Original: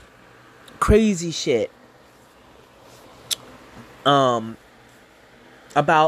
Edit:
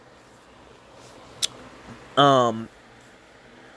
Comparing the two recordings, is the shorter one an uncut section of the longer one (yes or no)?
yes